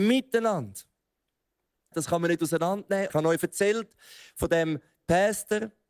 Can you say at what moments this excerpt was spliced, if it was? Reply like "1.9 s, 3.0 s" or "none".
1.9 s, 3.1 s